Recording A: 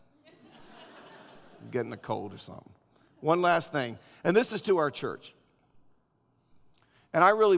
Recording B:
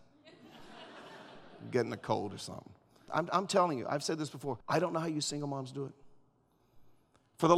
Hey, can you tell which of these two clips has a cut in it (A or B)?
B